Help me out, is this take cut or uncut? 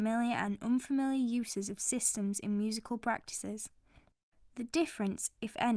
uncut